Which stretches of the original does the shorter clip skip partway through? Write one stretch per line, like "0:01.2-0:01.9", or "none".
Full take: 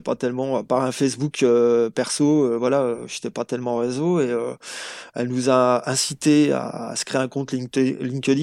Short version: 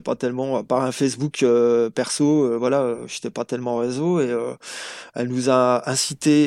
none